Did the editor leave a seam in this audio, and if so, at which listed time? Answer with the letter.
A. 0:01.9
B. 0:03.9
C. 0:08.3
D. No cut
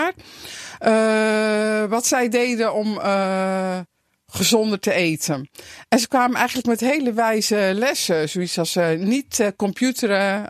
D